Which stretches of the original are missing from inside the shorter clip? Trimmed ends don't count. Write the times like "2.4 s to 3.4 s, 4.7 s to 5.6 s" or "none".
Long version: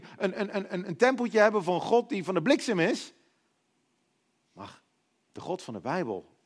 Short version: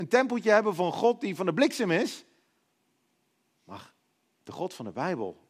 none